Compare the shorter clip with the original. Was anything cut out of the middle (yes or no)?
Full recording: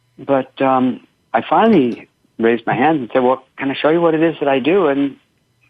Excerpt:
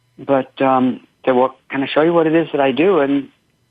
yes